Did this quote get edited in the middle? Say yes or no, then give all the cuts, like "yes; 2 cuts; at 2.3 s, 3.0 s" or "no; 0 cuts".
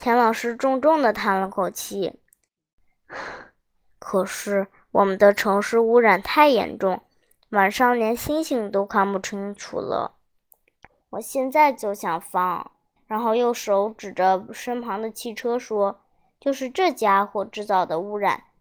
yes; 2 cuts; at 11.0 s, 13.0 s